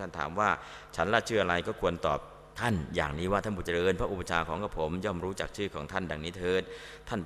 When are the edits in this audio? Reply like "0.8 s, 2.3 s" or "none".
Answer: 2.5 s